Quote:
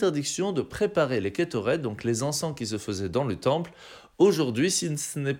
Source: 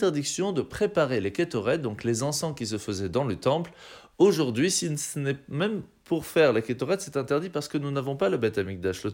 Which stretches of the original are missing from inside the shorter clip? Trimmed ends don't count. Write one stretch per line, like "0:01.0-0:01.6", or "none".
none